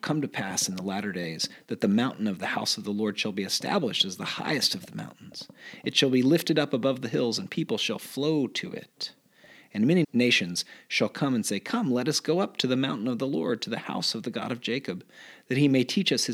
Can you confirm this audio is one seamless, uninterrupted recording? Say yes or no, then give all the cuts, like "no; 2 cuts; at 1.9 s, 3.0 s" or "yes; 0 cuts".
no; 1 cut; at 10.0 s